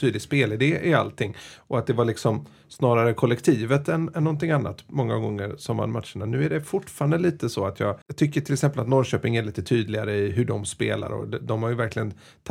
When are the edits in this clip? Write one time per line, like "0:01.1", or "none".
0:08.0